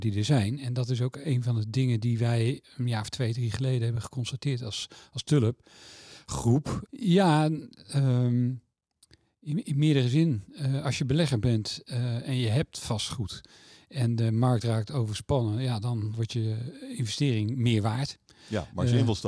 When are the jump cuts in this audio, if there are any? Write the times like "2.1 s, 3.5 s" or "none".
6.8 s, 16.1 s